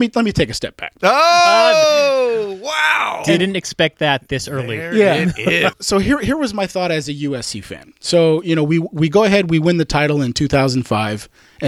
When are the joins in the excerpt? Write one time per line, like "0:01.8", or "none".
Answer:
0:01.0
0:05.7